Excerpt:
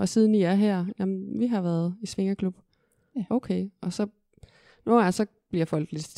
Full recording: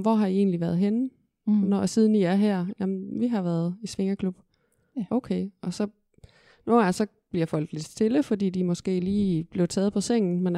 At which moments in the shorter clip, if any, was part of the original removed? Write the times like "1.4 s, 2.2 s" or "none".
none

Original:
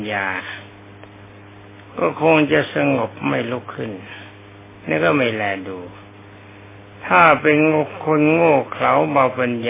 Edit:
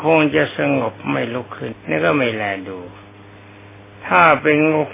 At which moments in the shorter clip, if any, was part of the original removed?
1.7 s

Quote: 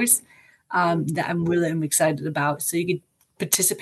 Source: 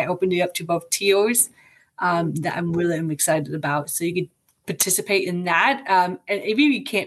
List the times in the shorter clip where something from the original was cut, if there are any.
none

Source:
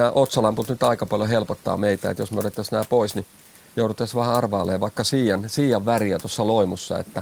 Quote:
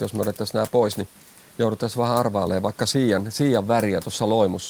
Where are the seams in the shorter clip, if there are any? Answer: none

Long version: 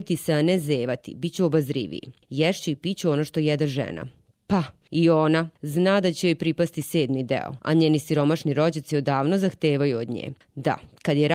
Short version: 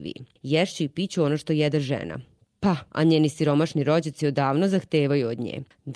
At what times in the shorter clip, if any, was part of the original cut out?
2.9 s

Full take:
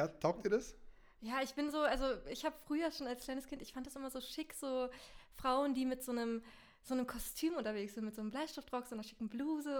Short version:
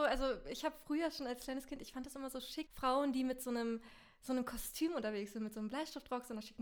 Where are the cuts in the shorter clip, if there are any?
2.7 s

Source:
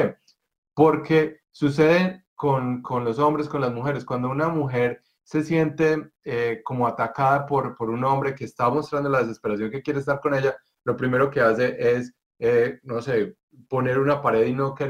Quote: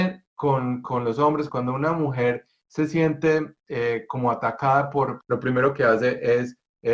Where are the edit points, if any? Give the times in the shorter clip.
1.5 s, 5.2 s

